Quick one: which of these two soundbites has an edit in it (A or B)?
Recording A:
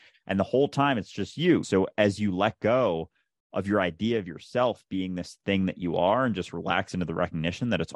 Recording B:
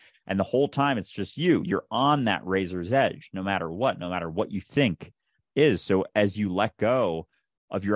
A